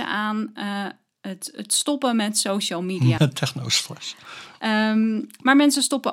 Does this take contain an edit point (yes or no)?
yes